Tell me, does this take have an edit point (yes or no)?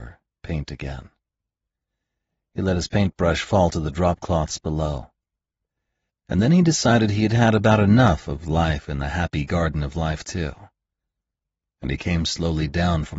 no